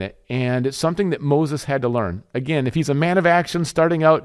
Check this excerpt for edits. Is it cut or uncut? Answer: uncut